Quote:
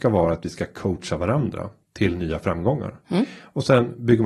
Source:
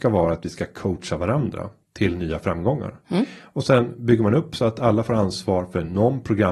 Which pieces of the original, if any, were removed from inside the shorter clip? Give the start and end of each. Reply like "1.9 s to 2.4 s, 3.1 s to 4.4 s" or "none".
none